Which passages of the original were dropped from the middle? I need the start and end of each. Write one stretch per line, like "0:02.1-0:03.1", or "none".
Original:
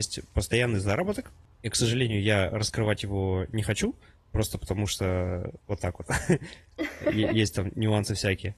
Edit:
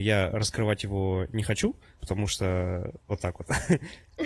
0:04.2-0:04.6